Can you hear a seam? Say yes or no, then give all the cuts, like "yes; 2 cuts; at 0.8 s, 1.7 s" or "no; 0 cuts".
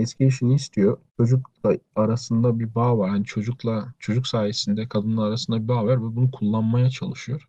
no; 0 cuts